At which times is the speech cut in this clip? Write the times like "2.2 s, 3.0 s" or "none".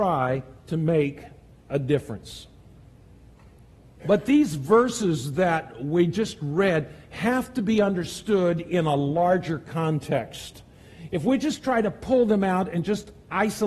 4.0 s